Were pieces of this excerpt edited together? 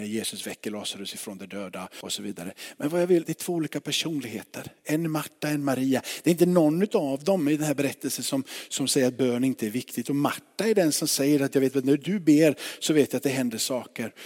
yes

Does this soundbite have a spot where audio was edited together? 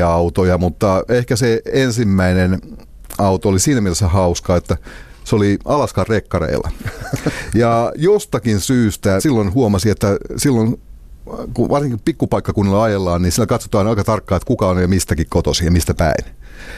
yes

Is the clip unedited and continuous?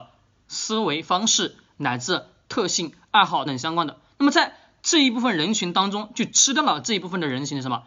no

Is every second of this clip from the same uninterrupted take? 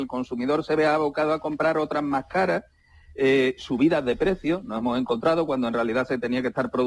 yes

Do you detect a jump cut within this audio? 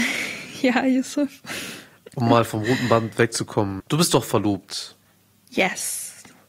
yes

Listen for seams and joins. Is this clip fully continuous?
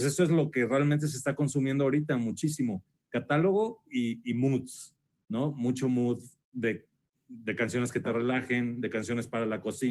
yes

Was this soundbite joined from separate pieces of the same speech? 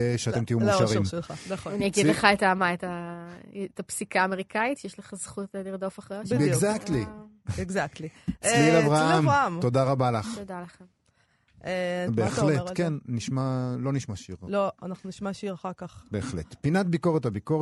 yes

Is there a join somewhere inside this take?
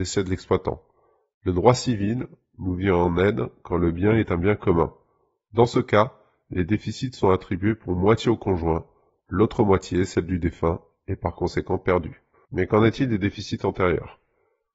yes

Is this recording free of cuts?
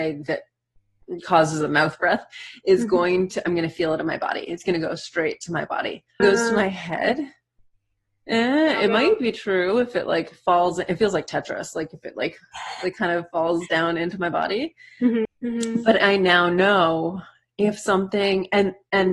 no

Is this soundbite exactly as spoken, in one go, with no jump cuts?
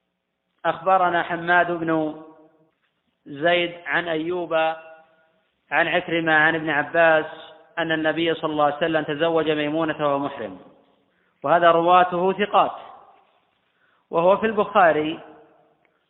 yes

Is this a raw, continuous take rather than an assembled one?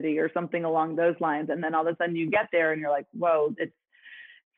yes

